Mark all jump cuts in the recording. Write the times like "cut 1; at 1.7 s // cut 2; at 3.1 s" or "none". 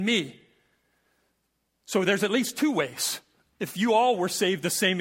none